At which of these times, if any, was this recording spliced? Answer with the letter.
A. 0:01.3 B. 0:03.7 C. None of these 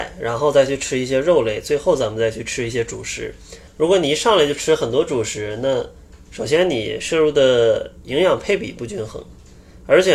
B